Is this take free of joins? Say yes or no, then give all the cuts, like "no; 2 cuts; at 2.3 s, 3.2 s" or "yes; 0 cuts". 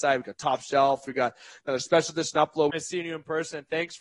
no; 1 cut; at 2.7 s